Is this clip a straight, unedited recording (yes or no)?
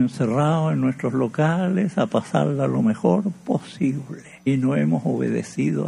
no